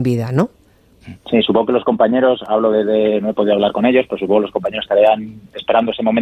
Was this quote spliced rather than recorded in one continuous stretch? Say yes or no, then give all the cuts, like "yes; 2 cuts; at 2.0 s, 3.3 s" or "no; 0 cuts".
yes; 1 cut; at 1.2 s